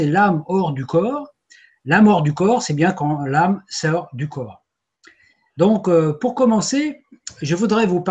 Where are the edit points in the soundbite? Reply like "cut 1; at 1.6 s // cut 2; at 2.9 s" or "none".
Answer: none